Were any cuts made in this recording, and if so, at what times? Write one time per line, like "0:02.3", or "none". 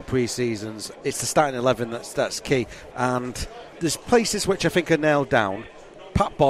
0:00.9
0:02.9

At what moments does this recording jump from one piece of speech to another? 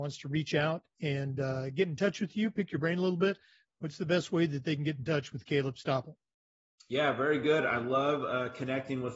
none

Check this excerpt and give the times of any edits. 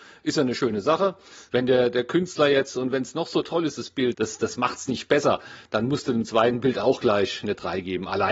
0:01.5
0:04.1

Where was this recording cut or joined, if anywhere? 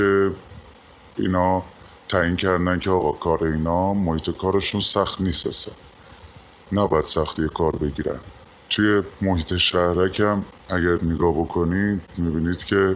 0:10.6

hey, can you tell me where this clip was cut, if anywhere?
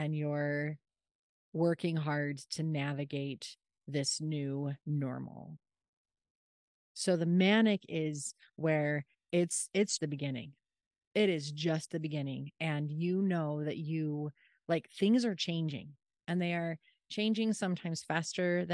0:04.8
0:10.0

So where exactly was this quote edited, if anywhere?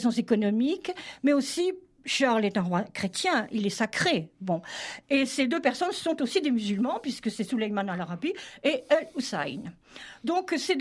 0:05.0

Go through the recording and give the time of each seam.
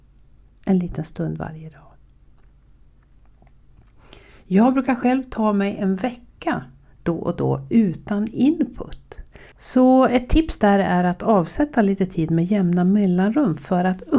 0:09.5

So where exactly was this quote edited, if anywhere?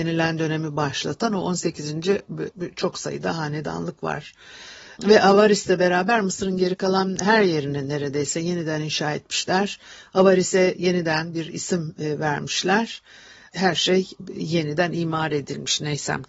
0:02.5

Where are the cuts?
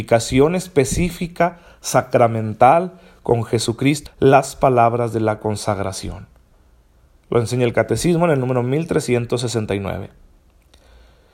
0:04.1

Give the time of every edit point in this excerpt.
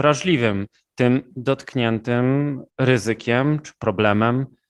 0:02.7

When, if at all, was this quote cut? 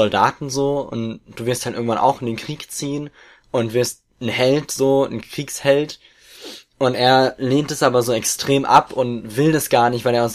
none

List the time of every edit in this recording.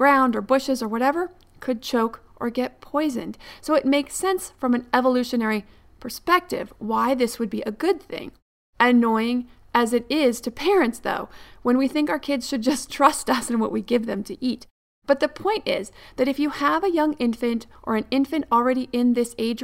none

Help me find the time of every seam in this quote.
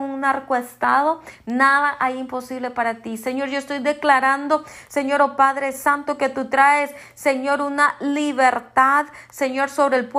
0:01.4

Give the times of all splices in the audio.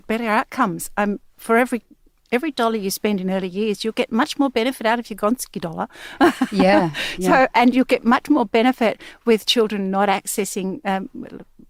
none

